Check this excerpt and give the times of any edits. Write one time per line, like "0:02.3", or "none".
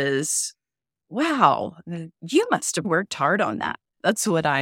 0:02.8